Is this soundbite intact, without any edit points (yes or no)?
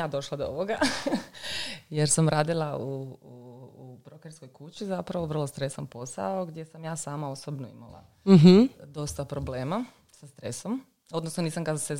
yes